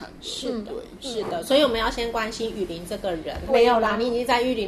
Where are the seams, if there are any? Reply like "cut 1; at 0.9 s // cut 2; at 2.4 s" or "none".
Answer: cut 1; at 3.5 s